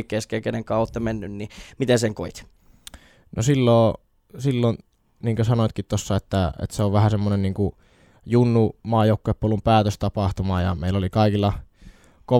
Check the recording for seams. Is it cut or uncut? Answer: uncut